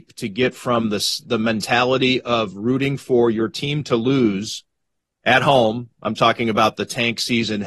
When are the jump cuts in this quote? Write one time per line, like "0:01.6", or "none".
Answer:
none